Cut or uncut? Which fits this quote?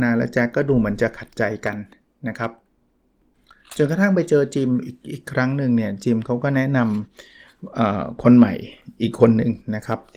uncut